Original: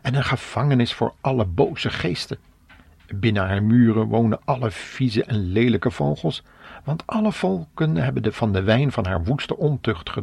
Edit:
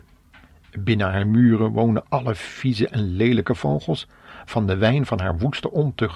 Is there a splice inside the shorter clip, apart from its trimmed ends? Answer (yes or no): yes